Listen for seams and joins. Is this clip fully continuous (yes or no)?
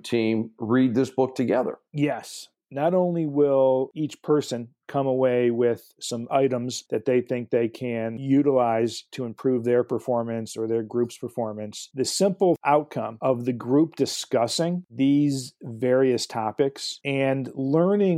no